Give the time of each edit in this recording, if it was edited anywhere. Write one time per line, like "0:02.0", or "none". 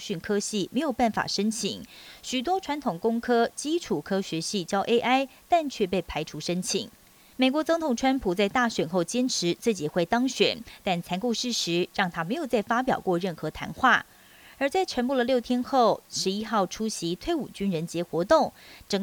0:07.3